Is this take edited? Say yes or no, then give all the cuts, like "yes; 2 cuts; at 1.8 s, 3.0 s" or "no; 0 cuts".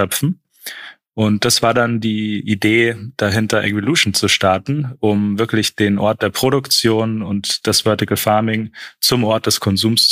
no; 0 cuts